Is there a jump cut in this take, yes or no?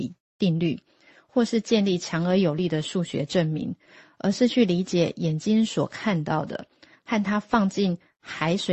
no